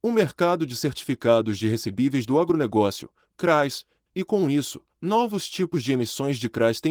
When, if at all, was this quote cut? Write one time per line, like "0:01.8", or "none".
0:04.1